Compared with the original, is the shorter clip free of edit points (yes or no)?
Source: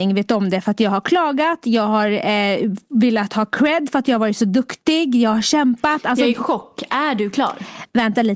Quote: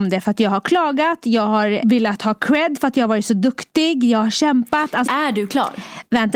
no